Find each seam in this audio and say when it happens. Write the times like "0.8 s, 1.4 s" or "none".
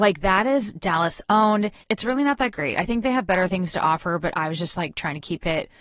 1.8 s